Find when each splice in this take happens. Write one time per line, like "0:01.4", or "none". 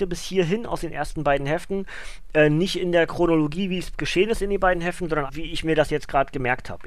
0:05.3